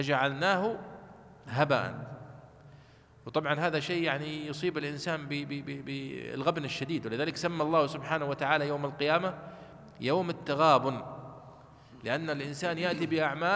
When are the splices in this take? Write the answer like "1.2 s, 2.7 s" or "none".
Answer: none